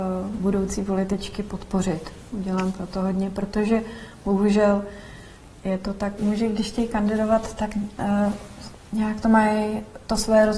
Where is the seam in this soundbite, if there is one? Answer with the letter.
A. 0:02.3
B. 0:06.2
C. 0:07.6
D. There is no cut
B